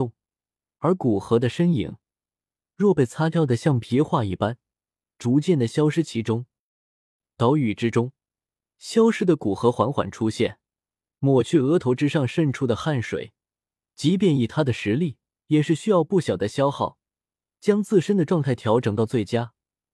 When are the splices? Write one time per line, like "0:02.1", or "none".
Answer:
0:15.4